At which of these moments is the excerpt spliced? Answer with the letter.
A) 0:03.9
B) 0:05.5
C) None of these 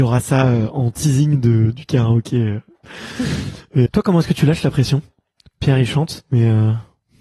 A